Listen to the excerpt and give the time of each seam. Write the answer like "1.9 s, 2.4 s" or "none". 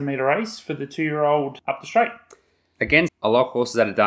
3.1 s